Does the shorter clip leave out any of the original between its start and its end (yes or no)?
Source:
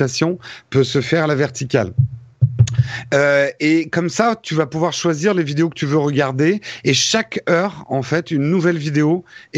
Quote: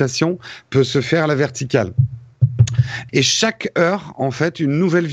yes